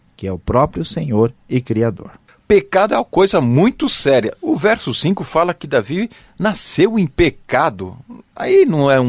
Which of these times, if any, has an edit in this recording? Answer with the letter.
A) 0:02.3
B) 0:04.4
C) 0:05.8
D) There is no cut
A